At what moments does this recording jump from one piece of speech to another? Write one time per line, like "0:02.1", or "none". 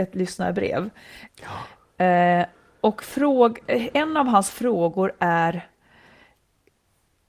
0:01.3